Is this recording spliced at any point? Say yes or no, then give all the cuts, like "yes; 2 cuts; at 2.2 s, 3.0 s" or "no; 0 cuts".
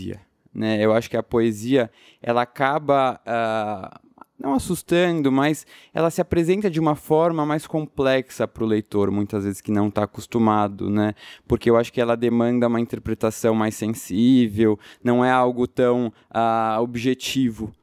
no; 0 cuts